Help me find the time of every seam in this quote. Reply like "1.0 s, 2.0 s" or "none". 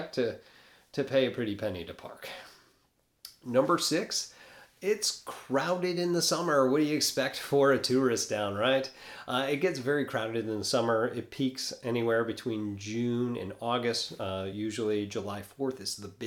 none